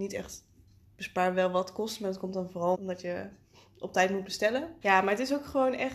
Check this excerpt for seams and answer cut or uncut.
cut